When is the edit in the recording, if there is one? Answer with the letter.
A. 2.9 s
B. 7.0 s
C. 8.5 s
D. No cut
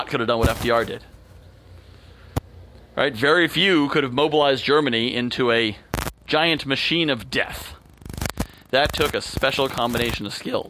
D